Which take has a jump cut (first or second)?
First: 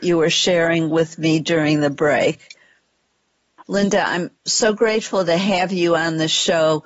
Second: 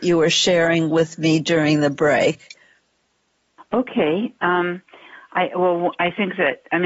first